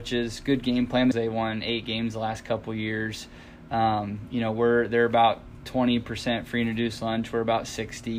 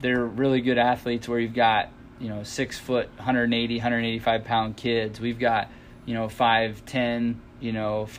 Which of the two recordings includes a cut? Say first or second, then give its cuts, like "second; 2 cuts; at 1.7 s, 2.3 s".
first; 1 cut; at 1.1 s